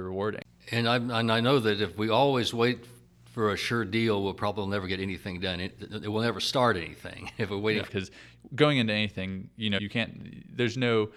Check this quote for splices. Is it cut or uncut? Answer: cut